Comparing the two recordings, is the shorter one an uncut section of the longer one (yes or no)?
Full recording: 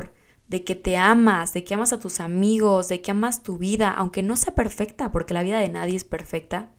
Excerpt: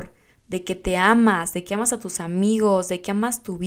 yes